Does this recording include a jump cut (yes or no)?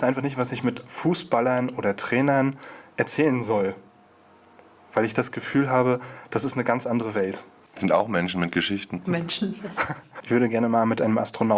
yes